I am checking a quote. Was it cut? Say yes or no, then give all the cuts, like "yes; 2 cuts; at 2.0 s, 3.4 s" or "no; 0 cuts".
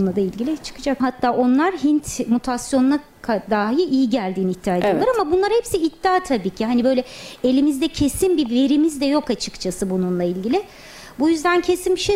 yes; 1 cut; at 1.0 s